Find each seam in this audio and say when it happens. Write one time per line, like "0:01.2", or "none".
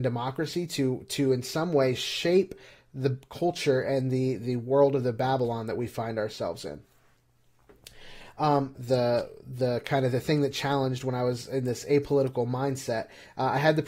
0:08.8